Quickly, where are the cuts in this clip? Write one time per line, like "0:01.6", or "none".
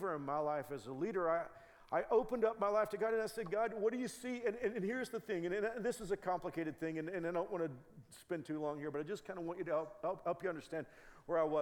none